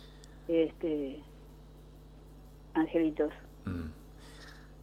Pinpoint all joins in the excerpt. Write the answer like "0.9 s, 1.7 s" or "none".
none